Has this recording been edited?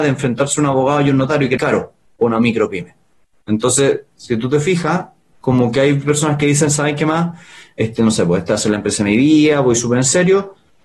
yes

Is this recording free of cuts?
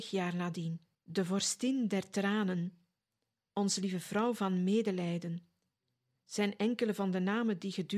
no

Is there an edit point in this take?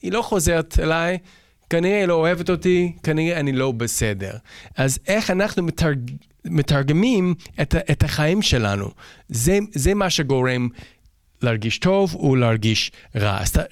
no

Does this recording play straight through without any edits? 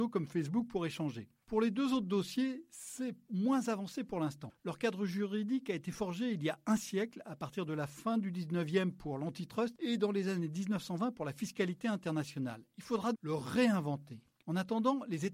no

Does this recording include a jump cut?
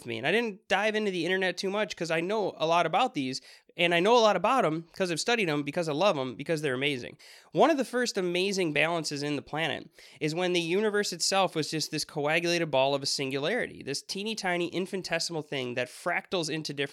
no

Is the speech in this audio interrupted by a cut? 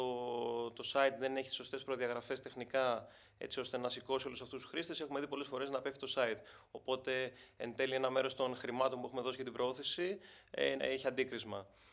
yes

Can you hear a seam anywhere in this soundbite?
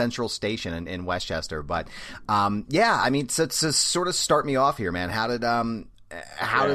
no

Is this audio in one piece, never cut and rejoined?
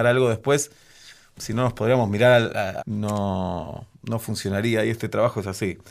no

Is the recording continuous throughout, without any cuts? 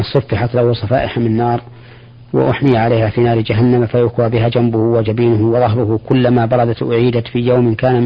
yes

